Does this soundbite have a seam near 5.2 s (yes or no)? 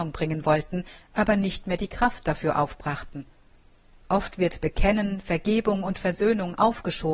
no